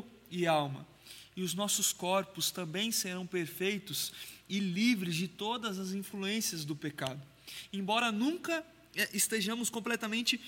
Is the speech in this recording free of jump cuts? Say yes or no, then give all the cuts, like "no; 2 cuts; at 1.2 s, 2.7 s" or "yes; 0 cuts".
yes; 0 cuts